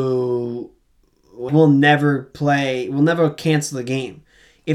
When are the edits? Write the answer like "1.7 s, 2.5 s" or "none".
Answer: 1.5 s